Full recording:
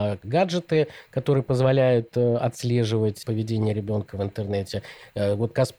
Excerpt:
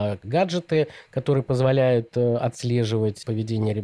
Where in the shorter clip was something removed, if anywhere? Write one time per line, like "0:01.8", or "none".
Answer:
none